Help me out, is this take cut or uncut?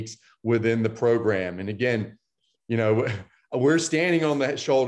uncut